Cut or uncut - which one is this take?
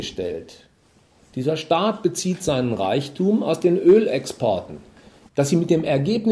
cut